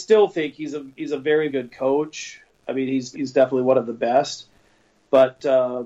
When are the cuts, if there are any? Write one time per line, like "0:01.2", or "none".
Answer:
0:01.5
0:03.1